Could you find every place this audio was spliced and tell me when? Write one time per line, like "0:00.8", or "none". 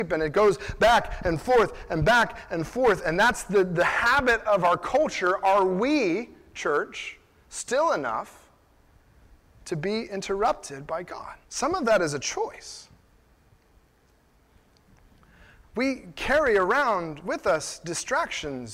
0:11.4